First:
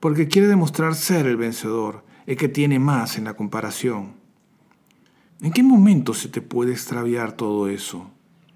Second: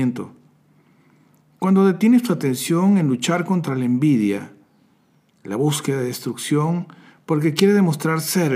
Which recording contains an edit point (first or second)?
first